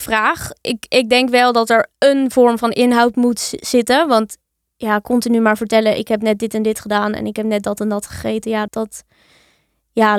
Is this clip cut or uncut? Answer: cut